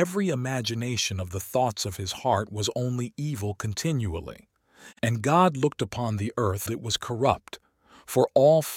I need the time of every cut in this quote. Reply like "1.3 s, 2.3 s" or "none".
5.0 s, 6.7 s